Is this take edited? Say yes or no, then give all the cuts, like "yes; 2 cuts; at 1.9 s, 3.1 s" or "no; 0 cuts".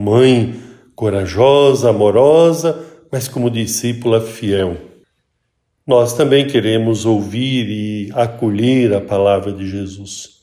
no; 0 cuts